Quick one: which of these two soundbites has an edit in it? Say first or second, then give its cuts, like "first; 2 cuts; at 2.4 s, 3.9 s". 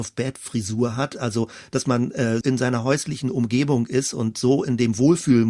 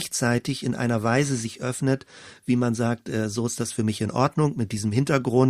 first; 1 cut; at 2.4 s